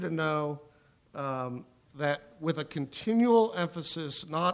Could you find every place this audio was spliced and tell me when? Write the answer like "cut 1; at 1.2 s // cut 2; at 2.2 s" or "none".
cut 1; at 1.9 s